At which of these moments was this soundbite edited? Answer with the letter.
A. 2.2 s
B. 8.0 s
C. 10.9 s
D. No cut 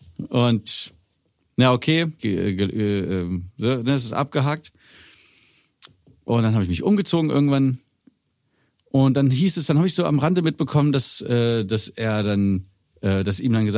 A